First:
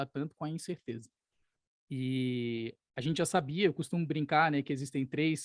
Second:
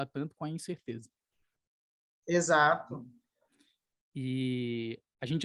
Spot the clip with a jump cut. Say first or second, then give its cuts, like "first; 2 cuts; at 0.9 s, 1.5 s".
first; 1 cut; at 1.7 s